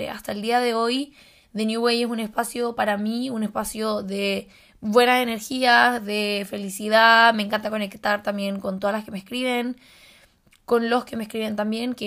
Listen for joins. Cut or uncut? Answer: uncut